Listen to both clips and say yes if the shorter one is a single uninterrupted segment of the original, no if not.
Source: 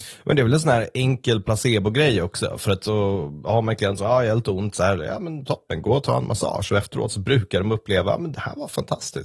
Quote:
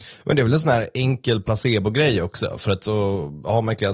yes